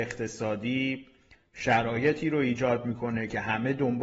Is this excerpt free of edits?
yes; 0 cuts

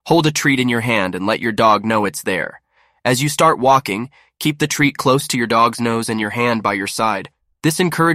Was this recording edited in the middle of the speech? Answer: no; 0 cuts

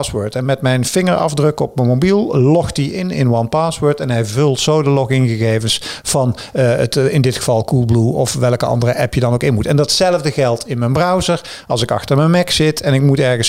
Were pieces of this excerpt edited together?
no; 0 cuts

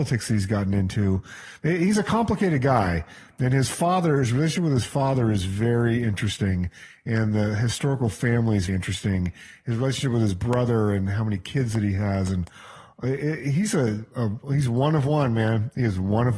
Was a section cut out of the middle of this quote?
yes; 1 cut; at 8.7 s

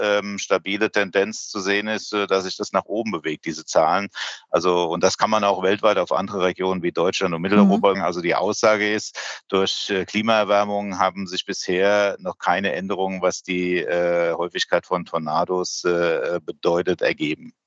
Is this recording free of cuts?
no; 1 cut; at 7.9 s

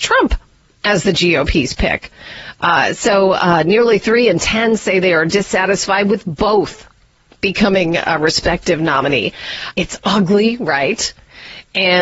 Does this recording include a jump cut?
yes; 1 cut; at 9.7 s

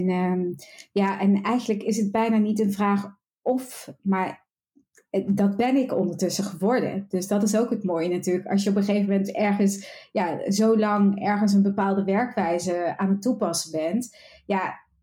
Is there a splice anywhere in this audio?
no; 0 cuts

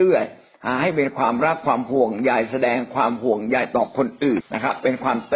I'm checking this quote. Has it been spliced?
yes; 1 cut; at 4.4 s

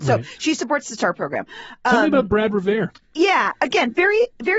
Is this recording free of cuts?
no; 1 cut; at 3.0 s

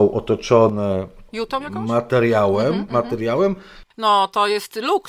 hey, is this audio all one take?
yes; 0 cuts

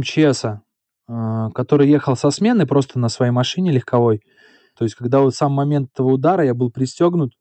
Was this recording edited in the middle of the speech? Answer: yes; 1 cut; at 4.8 s

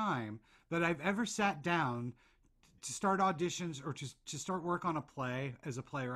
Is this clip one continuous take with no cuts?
no; 1 cut; at 2.8 s

